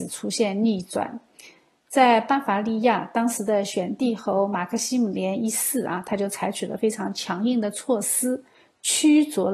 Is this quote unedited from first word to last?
yes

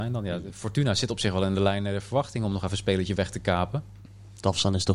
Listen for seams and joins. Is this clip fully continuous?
yes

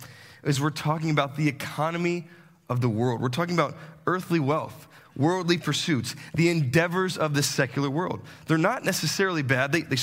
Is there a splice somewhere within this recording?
no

